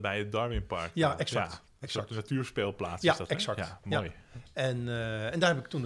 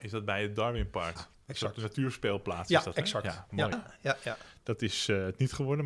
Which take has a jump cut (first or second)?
second